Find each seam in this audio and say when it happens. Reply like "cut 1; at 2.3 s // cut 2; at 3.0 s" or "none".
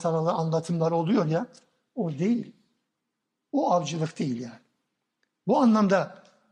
none